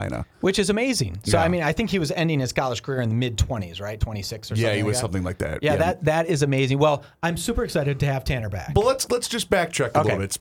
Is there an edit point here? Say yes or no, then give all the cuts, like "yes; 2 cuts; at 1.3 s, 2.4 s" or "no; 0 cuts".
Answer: no; 0 cuts